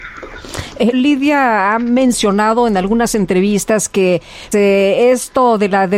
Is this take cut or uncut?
cut